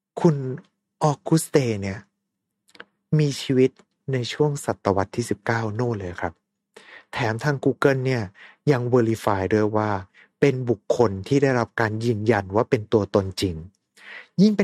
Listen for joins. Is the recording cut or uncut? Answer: uncut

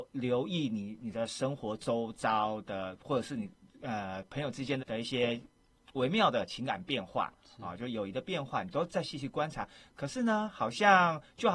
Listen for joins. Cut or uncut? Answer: cut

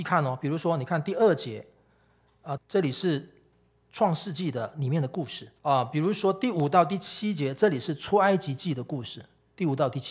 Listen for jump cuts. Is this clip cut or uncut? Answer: cut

